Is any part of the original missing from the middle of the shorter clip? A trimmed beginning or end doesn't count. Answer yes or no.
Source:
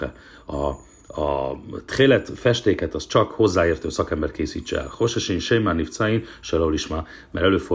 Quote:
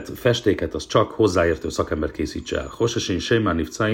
no